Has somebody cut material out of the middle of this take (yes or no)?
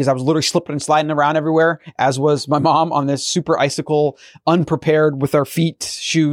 no